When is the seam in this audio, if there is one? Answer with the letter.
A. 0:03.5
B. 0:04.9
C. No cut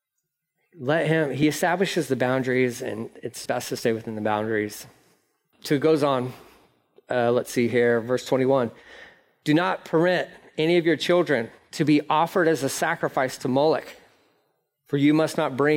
A